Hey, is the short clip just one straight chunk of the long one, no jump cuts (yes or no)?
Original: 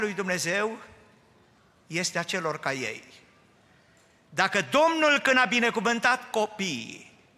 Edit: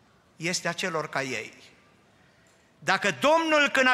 yes